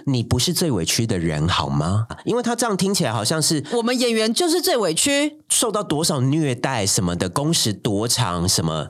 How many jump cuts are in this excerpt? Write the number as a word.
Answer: one